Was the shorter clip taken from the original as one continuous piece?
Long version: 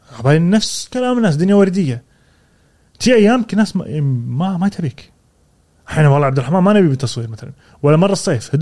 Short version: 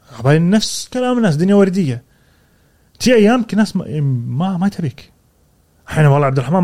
yes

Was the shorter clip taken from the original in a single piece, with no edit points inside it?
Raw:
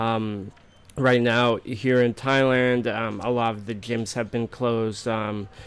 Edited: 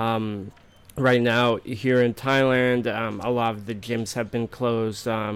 yes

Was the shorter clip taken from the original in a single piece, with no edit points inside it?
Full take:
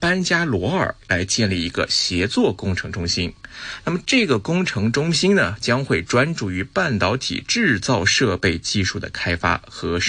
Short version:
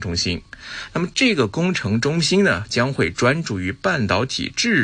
yes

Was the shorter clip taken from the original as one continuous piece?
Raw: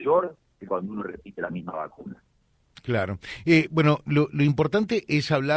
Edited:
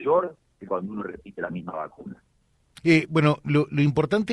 no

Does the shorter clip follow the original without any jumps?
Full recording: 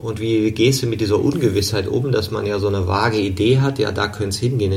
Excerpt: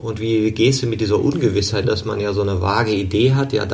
no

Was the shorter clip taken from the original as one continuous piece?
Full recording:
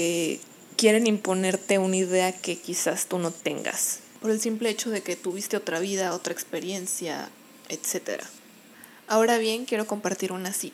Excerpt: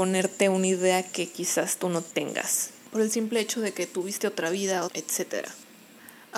no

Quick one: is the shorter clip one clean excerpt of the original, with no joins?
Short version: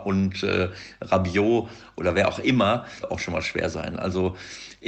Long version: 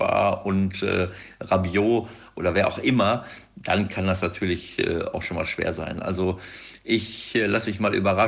no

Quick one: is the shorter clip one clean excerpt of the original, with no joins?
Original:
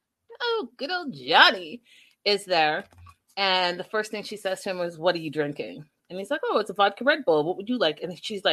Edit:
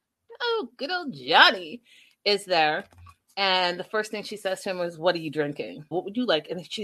no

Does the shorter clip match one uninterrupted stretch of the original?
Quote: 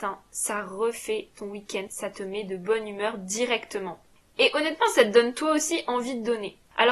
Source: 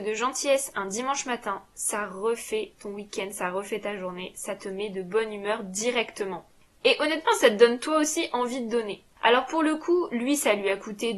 no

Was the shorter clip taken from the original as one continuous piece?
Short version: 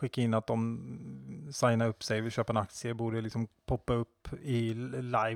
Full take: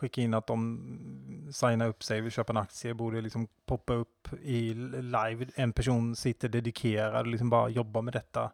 yes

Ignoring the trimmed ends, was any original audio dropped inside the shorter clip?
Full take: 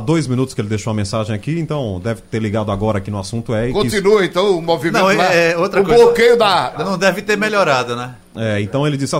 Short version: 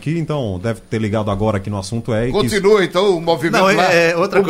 no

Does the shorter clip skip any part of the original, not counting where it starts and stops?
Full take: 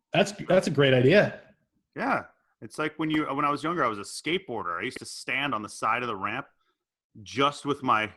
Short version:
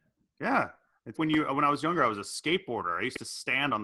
yes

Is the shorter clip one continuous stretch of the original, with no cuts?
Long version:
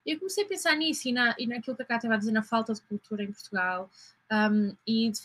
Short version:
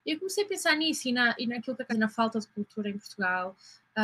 no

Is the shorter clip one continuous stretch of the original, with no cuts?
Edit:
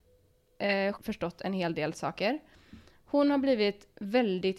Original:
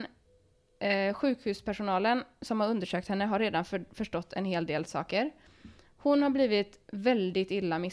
no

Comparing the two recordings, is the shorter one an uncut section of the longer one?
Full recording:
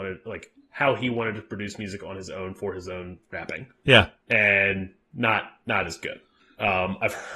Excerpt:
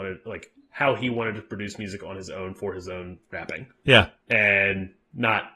yes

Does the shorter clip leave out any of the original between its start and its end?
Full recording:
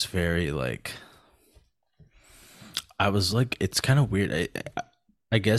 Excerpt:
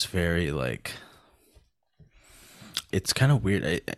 yes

